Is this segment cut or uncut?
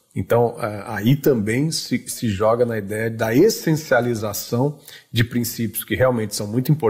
uncut